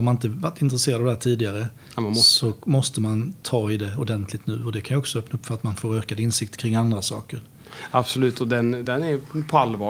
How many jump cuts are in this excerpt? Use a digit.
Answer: 1